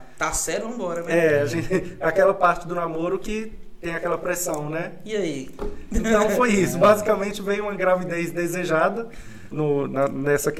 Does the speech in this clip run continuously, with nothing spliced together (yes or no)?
no